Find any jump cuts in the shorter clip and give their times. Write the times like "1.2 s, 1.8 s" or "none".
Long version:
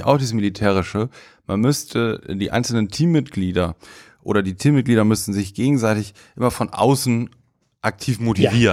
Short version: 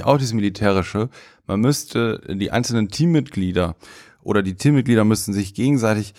none

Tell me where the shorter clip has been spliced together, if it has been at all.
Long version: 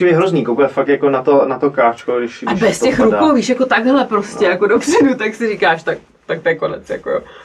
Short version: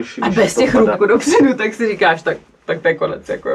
0.9 s

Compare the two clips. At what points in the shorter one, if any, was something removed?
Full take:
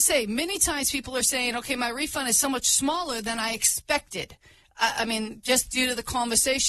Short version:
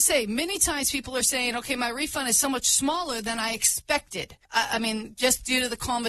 4.4 s

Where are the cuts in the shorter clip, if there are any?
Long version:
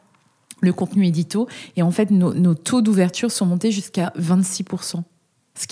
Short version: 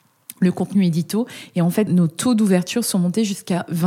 1.9 s

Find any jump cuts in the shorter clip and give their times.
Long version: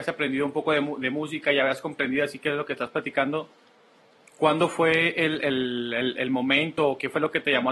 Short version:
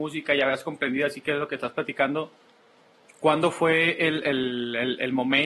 none

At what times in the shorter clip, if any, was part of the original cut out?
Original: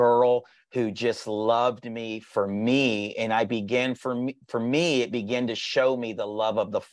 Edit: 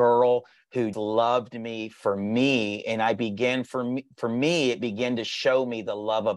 0.9 s

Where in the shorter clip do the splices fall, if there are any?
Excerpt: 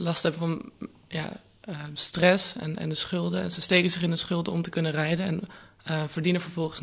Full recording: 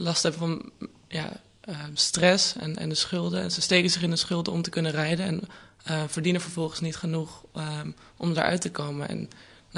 none

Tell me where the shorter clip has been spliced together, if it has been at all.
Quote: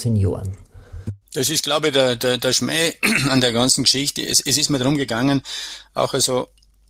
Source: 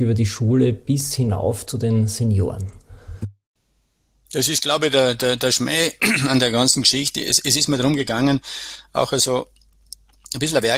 1.2 s

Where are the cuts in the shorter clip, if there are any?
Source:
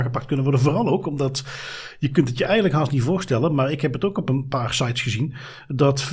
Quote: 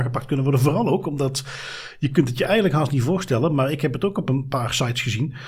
none

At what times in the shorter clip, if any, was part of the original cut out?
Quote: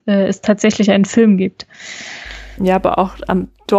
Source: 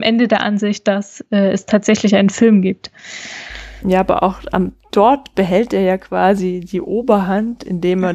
none

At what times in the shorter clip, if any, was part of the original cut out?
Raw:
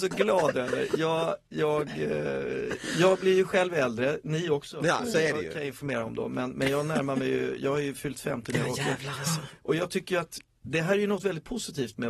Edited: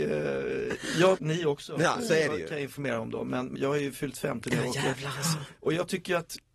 1.2 s, 3.6 s

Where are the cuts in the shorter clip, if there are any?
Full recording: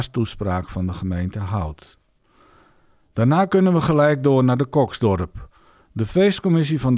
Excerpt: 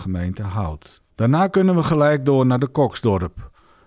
1.1 s

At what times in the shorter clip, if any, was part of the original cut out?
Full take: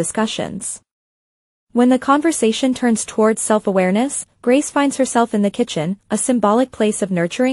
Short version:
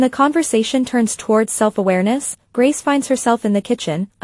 none

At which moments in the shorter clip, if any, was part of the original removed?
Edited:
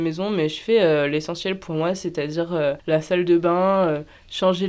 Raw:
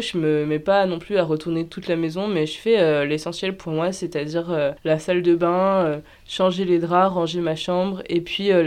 none

